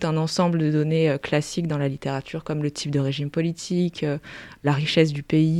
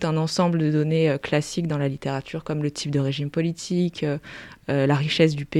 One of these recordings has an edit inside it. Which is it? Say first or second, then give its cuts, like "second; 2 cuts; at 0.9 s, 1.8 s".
first; 1 cut; at 4.6 s